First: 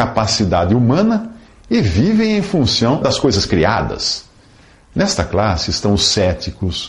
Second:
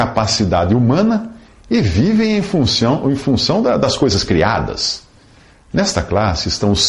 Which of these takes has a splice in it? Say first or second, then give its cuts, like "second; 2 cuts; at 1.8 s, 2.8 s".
first; 1 cut; at 3.0 s